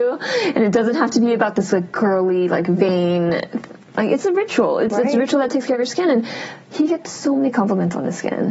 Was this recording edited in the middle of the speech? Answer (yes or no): no